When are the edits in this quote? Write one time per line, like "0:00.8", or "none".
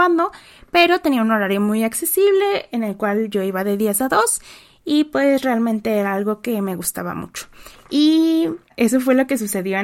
0:07.8